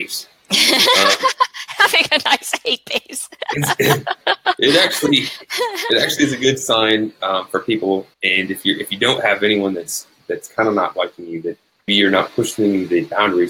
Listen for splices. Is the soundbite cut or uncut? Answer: cut